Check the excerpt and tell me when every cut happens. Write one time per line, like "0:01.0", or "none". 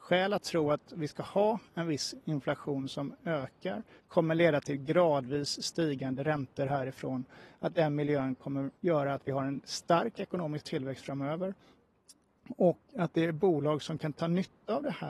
0:04.0
0:08.8